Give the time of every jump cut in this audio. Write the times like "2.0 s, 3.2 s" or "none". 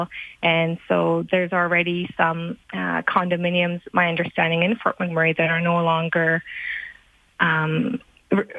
2.6 s